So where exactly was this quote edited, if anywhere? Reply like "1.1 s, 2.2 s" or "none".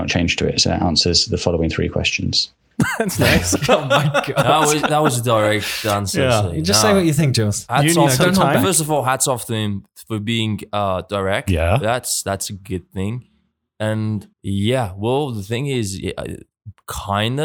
14.3 s